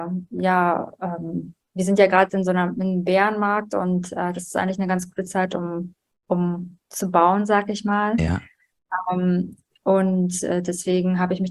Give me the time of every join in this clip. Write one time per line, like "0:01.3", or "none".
0:01.6